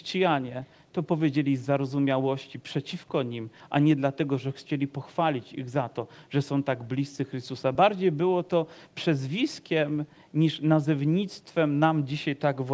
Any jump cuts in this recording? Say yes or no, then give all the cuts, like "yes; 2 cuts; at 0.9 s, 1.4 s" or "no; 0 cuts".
no; 0 cuts